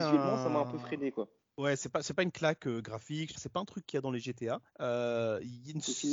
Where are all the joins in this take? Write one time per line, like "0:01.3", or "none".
0:03.3
0:04.7

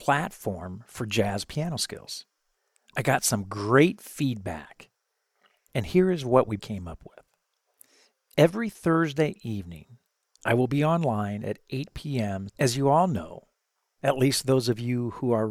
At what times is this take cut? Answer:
0:06.6
0:12.5

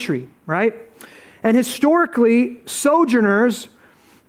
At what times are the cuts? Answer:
none

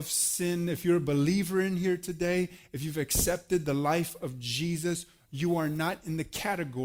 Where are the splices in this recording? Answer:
none

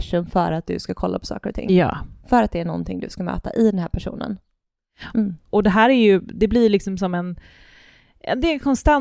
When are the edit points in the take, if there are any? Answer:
0:05.1

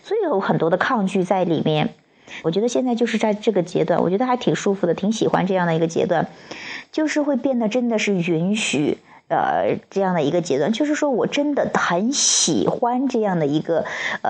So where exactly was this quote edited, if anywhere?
0:02.4

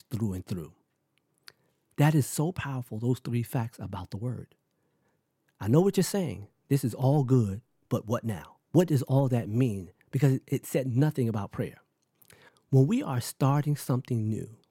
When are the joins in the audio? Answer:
none

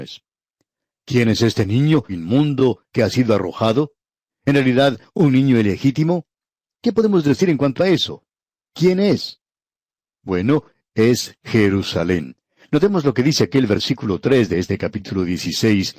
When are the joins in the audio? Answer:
0:02.1

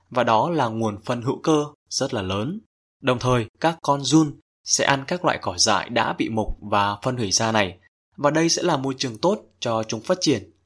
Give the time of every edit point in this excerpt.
none

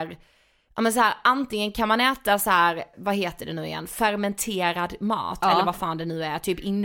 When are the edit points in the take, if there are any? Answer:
0:02.9

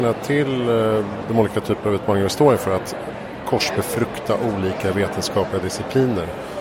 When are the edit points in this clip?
none

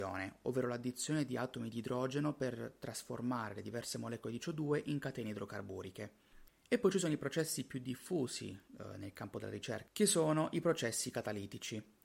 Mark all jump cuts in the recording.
0:06.5
0:08.7
0:09.9

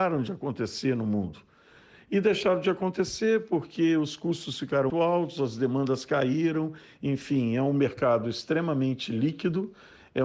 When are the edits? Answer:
0:04.9

